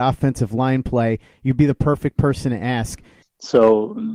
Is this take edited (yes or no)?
yes